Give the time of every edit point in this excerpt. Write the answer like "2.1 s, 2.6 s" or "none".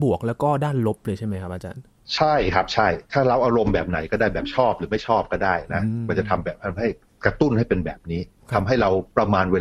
none